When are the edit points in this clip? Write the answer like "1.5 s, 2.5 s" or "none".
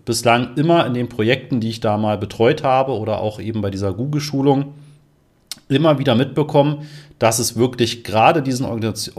none